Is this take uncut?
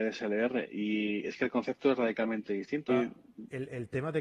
no; 1 cut; at 2.9 s

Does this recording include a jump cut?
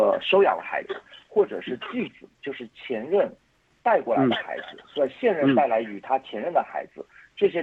no; 0 cuts

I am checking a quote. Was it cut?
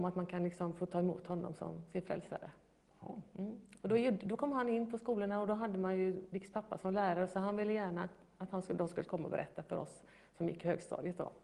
no; 0 cuts

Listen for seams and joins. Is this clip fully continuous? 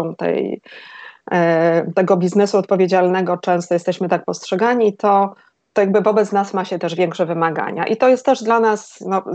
yes; 0 cuts

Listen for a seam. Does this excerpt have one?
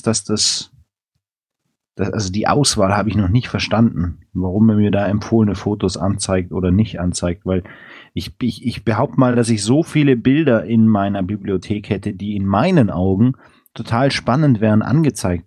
no; 0 cuts

